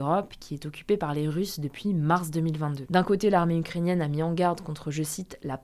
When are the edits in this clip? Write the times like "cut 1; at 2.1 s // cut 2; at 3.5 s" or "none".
none